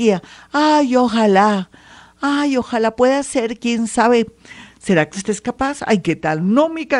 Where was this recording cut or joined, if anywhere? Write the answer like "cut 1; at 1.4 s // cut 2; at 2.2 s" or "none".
none